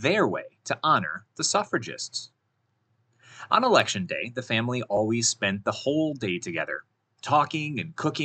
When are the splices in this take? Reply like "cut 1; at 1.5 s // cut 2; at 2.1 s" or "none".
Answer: none